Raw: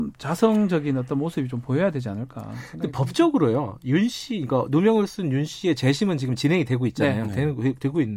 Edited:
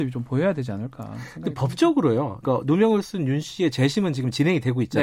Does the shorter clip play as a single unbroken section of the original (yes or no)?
no